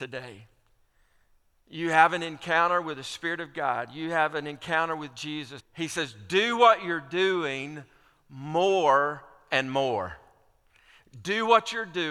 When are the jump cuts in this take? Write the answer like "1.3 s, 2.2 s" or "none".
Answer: 5.6 s